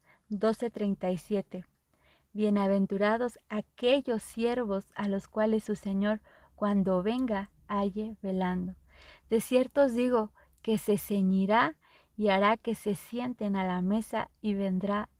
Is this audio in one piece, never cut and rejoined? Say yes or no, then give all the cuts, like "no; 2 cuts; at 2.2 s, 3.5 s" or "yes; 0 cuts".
yes; 0 cuts